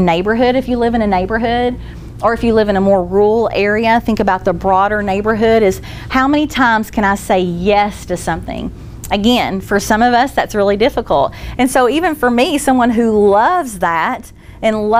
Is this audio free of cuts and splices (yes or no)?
no